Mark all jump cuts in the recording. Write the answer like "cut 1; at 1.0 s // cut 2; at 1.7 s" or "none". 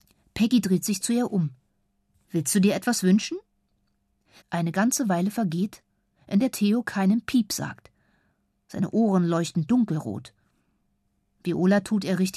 cut 1; at 4.4 s